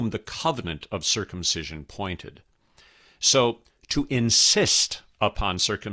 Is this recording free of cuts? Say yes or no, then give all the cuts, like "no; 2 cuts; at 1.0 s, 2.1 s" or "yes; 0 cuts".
yes; 0 cuts